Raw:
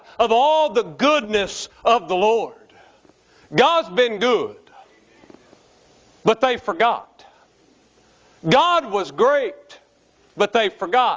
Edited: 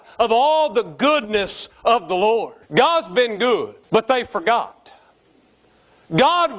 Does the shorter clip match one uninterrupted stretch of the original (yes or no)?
no